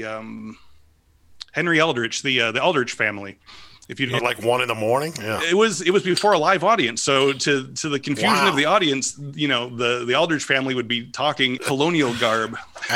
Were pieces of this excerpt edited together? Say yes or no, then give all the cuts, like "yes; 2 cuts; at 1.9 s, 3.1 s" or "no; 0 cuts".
yes; 2 cuts; at 4.2 s, 11.6 s